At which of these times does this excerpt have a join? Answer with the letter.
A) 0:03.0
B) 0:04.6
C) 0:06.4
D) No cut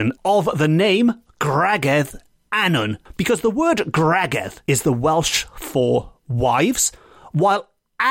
B